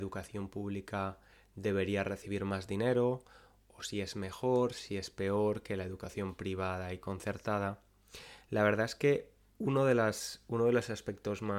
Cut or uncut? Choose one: uncut